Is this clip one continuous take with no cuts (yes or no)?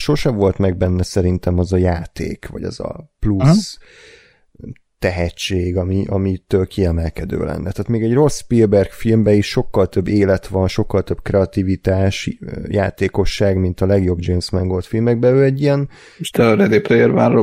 yes